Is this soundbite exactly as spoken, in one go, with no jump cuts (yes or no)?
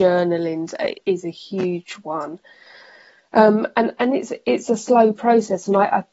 yes